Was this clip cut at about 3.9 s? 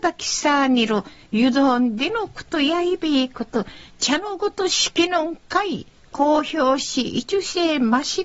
yes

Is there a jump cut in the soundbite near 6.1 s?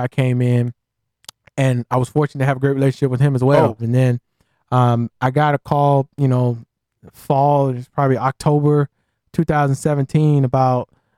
no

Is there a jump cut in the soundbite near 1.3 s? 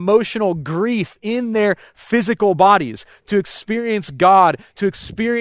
no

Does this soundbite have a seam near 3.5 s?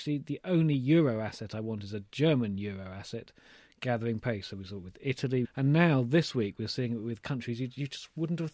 no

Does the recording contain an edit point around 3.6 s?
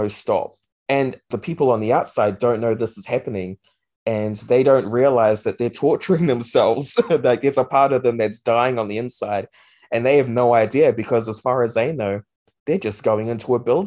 no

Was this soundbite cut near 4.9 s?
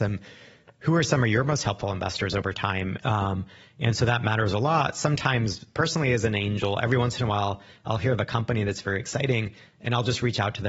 no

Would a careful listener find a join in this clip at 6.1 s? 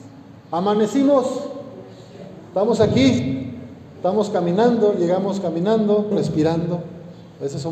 yes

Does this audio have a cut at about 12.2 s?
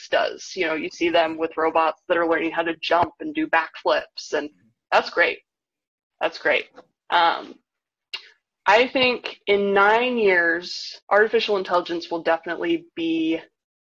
no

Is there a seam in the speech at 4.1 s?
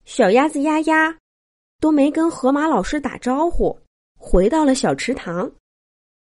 yes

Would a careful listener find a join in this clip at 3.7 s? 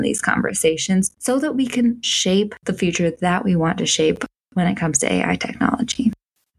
no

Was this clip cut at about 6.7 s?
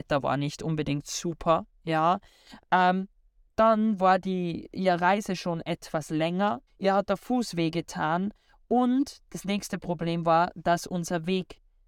yes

